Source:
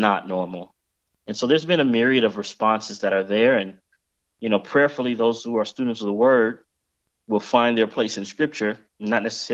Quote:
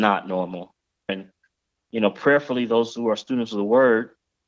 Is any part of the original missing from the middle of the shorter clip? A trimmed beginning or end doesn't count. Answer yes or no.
yes